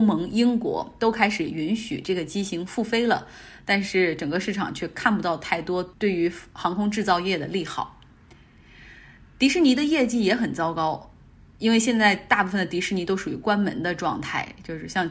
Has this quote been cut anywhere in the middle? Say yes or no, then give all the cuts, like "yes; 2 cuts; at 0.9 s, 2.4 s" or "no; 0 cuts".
no; 0 cuts